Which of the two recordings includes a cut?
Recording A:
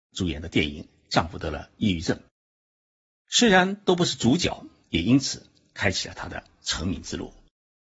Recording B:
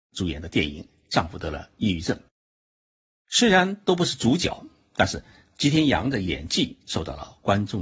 A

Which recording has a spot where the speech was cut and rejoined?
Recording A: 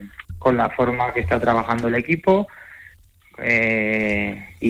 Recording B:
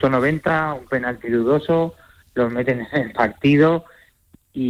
B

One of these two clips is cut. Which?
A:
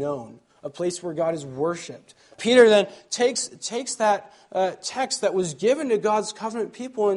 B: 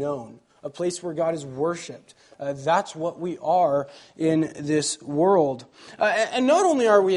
A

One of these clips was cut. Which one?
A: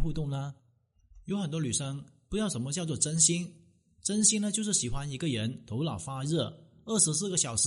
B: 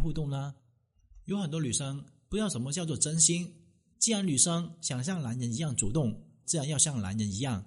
B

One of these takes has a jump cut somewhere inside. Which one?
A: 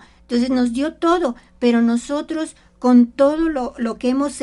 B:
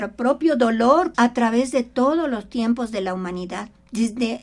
B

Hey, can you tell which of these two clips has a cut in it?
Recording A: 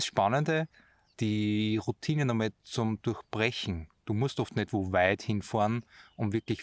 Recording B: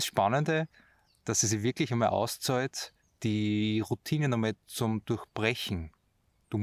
A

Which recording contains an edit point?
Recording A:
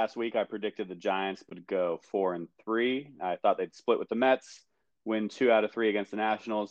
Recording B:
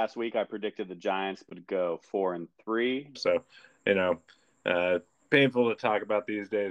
B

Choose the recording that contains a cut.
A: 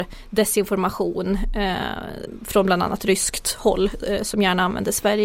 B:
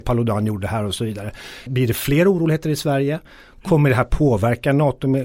B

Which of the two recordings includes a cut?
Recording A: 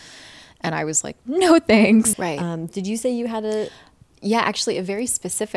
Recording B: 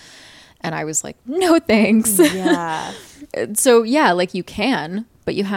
A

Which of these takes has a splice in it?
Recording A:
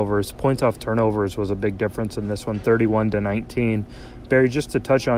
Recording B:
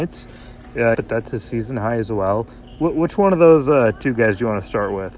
B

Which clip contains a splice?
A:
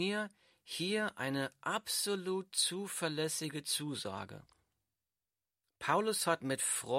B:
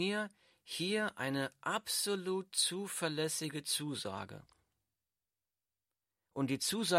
A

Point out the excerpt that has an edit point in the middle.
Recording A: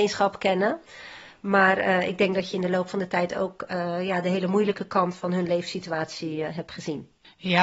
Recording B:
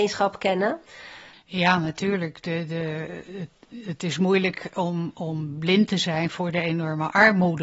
B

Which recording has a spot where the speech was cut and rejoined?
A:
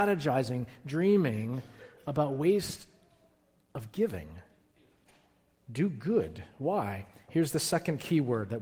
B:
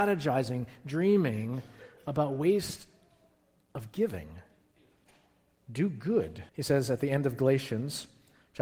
B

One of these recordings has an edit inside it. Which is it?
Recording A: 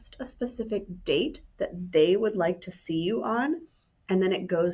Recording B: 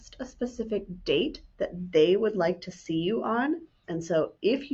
B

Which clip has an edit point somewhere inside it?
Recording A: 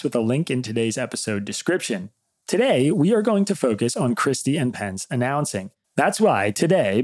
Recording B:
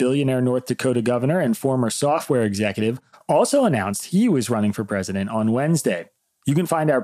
A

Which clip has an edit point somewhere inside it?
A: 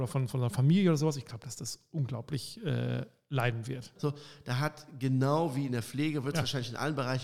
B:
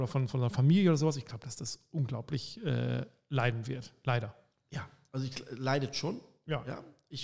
A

